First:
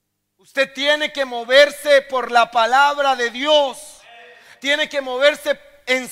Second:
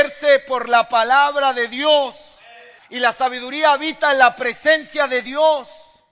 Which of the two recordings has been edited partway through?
second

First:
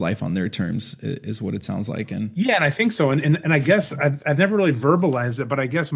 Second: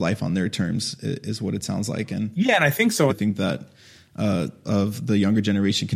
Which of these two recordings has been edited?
second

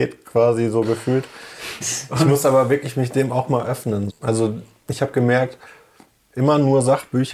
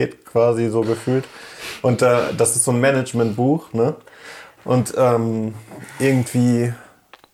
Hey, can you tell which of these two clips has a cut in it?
first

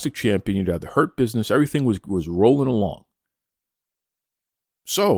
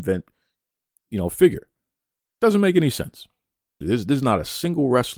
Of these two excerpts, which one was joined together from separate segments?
second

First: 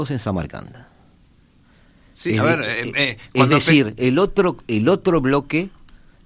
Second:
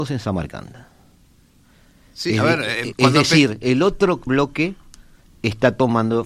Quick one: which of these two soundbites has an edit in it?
second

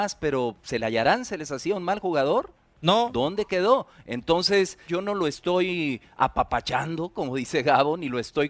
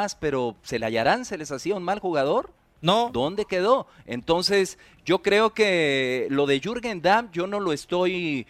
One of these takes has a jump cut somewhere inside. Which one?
first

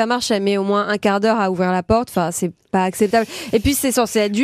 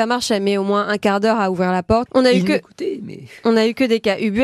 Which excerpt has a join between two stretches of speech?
second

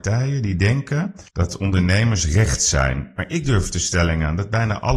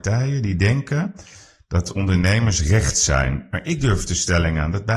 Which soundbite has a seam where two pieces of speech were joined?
first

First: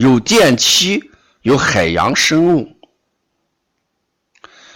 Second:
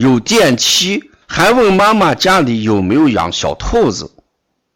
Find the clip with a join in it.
second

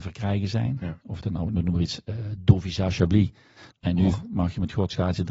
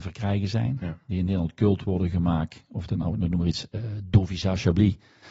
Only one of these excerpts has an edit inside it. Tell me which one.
first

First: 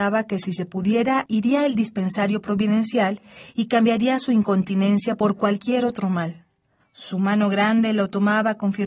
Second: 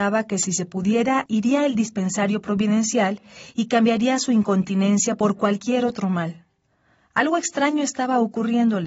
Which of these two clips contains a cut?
first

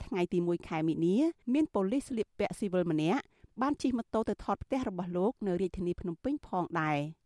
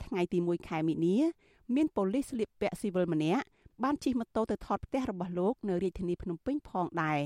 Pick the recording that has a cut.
first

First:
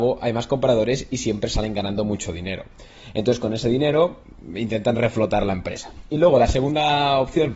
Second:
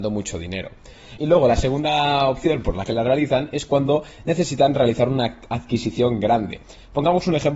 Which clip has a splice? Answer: second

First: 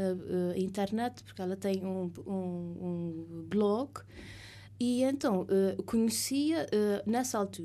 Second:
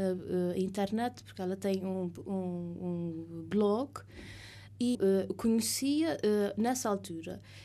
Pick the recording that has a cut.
second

